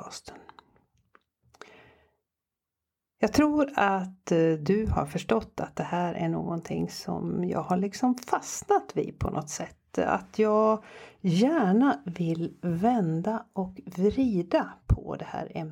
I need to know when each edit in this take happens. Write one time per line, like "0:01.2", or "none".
none